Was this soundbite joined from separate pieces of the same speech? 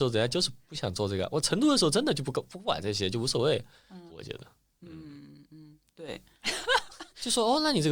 yes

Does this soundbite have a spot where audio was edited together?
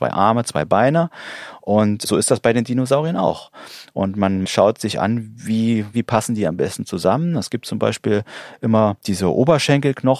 yes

